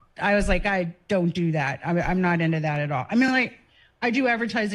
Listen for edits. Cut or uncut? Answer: uncut